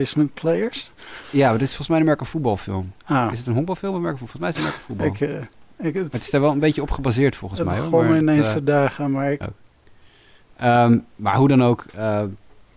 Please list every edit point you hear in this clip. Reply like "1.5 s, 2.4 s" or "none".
9.4 s